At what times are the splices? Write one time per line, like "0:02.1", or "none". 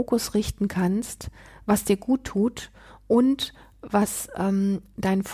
none